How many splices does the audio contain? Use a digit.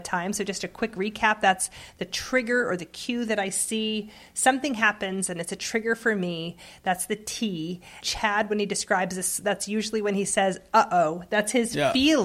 1